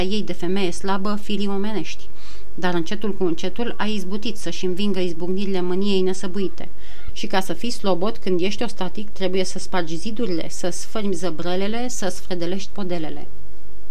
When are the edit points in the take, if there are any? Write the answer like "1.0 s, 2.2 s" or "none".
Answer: 7.1 s